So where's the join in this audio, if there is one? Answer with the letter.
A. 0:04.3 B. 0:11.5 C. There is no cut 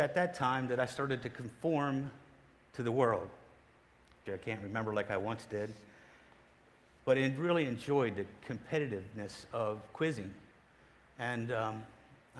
A